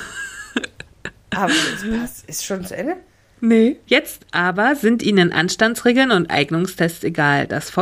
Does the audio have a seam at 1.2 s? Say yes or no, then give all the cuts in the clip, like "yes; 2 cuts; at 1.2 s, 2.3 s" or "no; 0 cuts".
no; 1 cut; at 3.9 s